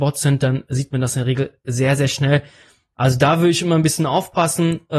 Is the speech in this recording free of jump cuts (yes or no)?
no